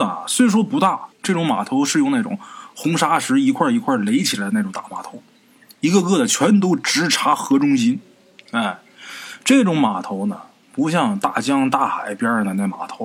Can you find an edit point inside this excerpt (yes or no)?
yes